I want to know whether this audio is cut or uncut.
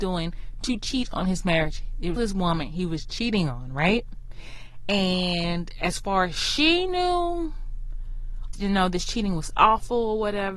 cut